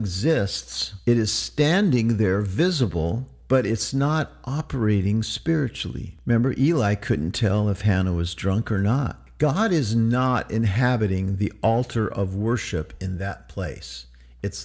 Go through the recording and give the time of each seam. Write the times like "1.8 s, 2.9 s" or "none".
none